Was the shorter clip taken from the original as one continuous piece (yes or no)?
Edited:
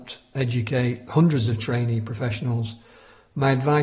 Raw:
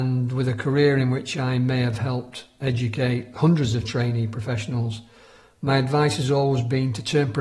yes